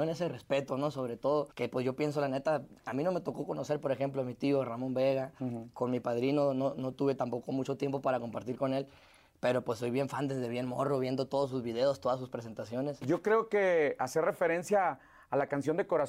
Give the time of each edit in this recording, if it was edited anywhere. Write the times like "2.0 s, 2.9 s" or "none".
1.5 s, 13.0 s